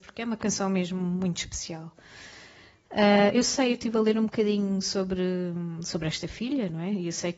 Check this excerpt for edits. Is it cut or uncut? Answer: uncut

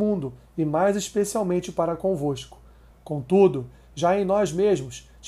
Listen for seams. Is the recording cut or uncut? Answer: cut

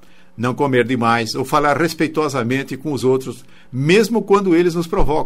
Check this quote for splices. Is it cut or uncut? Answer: uncut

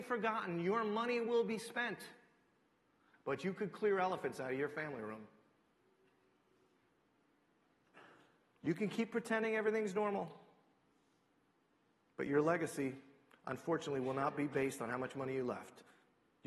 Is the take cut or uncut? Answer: uncut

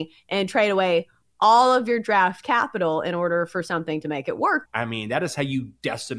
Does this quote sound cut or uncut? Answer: cut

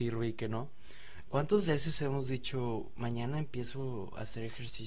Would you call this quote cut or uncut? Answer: cut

